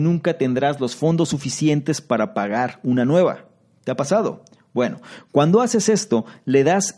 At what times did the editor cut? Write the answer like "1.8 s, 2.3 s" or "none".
none

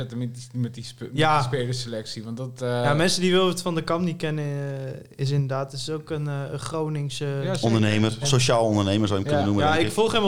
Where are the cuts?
8.2 s

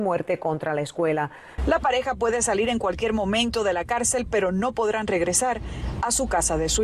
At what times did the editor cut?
1.6 s

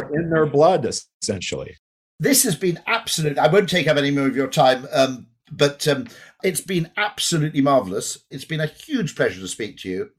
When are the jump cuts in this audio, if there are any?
8.3 s

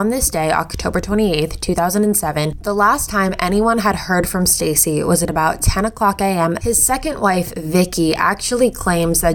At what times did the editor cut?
6.6 s

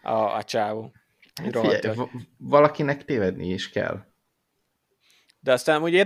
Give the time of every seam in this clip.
none

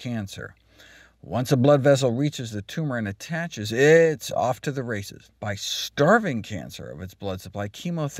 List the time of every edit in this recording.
5.3 s

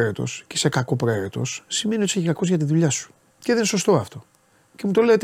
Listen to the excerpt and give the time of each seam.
3.3 s

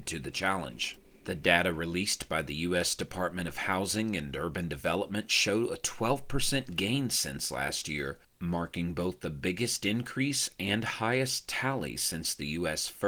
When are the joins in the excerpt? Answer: none

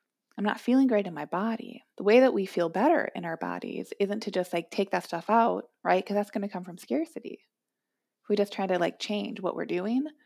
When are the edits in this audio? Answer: 1.9 s

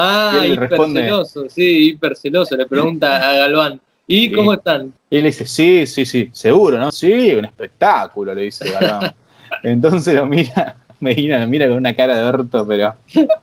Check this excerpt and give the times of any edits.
5.0 s, 6.9 s

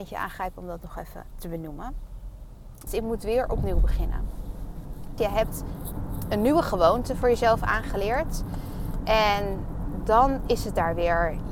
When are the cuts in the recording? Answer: 2.9 s, 5.2 s

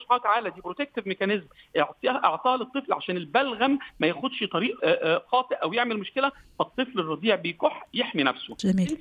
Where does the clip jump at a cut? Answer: 4.8 s

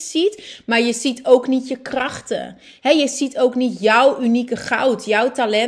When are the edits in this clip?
none

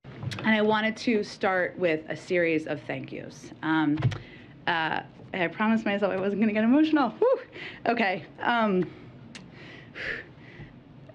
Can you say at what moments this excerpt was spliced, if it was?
none

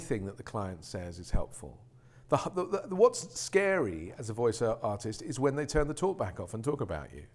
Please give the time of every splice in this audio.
none

